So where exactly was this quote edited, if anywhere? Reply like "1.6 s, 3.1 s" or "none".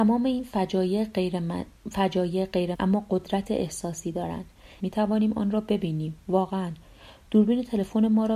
2.7 s, 4.8 s